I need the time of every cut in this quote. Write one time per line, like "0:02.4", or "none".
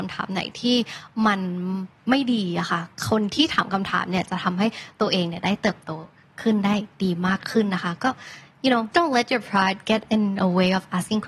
0:08.9